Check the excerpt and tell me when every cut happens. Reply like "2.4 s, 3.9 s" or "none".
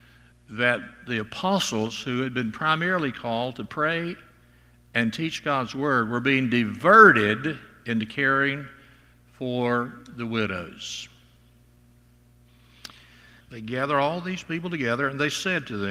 13.4 s